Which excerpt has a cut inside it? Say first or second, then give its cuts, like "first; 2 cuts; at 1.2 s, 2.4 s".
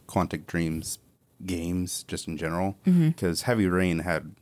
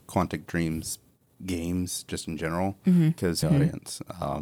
second; 1 cut; at 3.4 s